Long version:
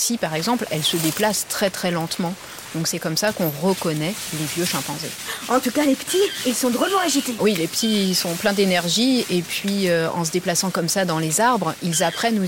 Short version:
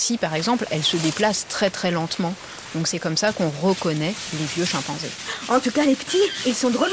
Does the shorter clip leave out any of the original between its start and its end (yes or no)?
no